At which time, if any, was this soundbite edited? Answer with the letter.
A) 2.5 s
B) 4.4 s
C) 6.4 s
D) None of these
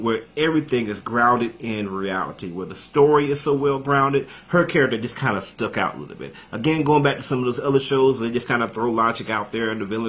B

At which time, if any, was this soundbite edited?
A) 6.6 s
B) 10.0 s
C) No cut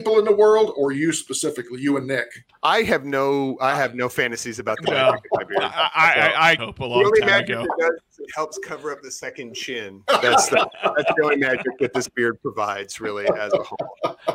A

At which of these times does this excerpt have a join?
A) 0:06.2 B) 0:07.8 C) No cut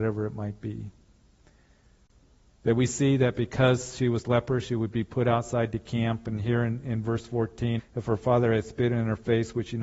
B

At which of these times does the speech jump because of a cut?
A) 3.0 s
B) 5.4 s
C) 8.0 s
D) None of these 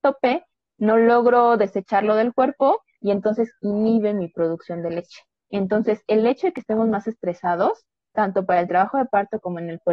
B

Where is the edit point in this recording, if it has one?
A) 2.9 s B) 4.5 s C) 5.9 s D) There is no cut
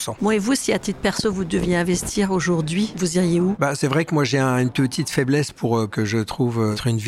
C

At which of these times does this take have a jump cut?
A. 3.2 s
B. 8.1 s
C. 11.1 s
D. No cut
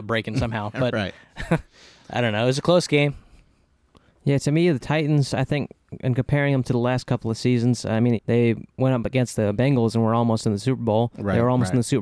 B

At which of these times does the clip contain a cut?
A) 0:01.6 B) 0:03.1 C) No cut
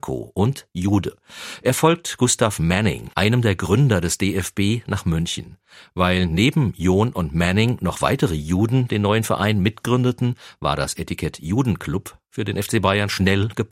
B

